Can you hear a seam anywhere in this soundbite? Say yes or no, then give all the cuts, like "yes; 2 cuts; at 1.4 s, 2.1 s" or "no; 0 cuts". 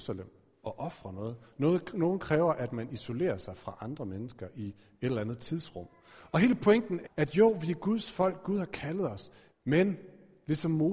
yes; 2 cuts; at 7.0 s, 9.5 s